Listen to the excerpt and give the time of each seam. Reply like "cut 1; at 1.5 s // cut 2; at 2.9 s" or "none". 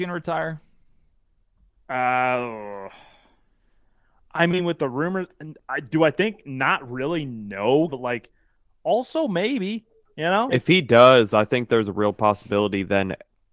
cut 1; at 7.9 s // cut 2; at 10.5 s